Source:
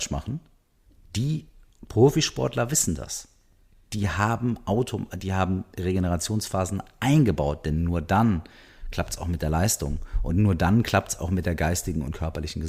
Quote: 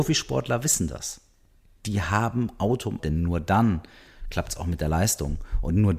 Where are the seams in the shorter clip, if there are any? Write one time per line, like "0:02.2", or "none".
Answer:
0:03.0